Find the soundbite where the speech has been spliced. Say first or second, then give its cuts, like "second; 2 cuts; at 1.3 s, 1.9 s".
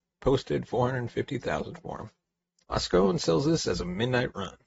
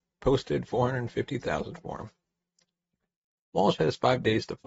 first; 1 cut; at 2.6 s